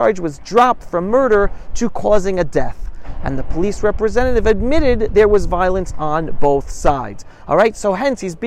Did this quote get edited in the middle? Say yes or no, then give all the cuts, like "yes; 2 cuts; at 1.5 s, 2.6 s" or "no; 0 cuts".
no; 0 cuts